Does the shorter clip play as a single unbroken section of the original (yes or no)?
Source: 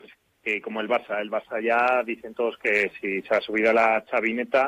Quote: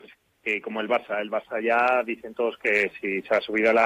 yes